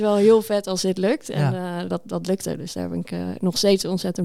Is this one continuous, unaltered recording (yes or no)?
yes